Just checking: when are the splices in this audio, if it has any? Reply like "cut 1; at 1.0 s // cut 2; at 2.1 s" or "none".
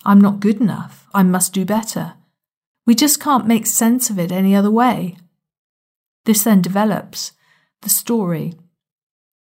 cut 1; at 1.1 s // cut 2; at 2.7 s